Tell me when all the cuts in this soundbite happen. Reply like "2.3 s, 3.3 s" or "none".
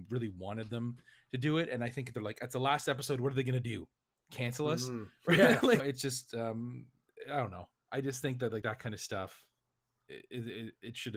5.8 s